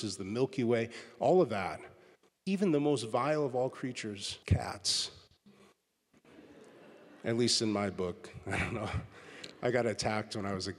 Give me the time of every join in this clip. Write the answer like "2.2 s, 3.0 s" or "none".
4.4 s